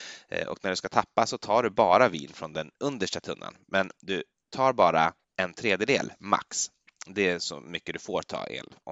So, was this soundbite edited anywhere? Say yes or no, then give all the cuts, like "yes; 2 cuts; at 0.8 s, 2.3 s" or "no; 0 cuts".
yes; 1 cut; at 5.2 s